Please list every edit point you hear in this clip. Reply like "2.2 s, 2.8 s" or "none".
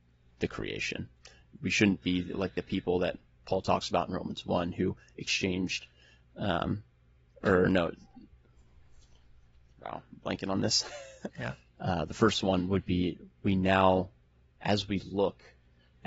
11.3 s